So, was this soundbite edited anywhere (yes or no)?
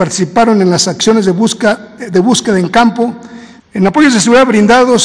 yes